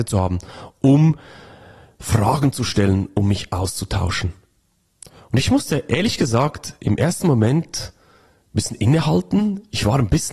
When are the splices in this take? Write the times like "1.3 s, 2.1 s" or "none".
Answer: none